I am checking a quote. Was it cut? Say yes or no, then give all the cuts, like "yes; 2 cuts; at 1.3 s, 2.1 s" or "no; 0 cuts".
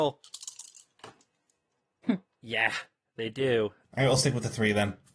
yes; 2 cuts; at 2.0 s, 3.8 s